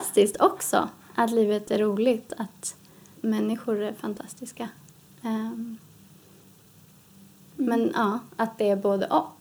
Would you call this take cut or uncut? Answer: cut